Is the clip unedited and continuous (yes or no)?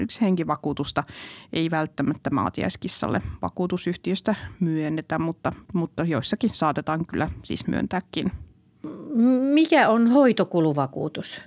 no